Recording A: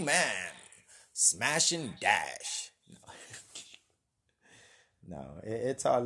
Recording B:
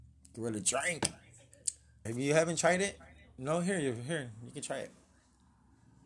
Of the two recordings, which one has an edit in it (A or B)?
B